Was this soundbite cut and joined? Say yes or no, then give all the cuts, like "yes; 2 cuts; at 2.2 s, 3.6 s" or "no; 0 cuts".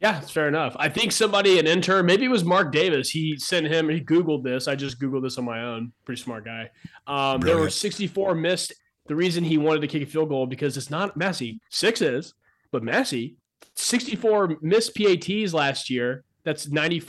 yes; 1 cut; at 11.6 s